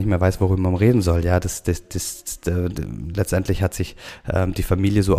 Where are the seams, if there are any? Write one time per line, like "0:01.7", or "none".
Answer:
none